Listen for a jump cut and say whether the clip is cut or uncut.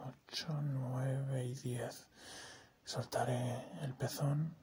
uncut